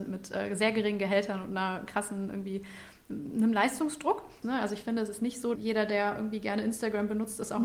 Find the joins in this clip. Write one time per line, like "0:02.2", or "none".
0:04.4
0:05.6